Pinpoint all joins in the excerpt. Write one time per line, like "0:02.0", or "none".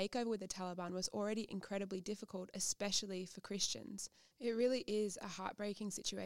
0:04.3